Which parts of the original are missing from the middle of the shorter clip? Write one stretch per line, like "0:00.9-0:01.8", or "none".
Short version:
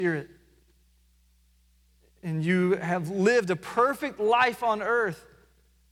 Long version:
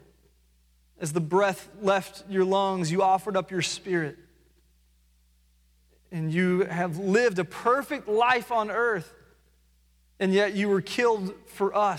none